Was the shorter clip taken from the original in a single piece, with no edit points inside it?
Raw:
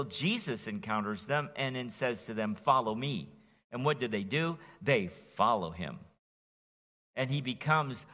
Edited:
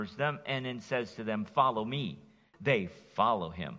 no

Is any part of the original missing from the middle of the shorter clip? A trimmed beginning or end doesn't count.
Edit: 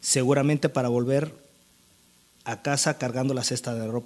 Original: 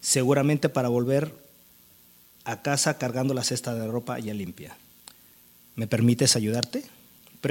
no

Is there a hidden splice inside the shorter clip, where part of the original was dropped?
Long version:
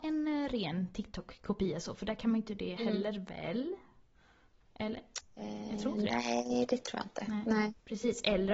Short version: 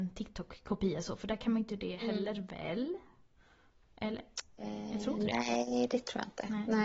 no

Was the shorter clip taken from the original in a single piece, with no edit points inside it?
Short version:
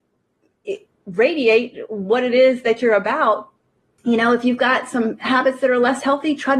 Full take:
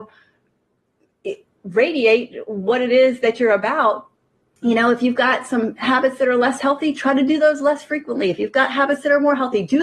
yes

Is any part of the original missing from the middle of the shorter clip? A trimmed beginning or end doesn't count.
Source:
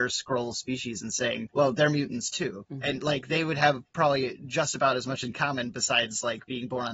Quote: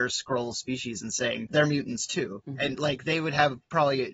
yes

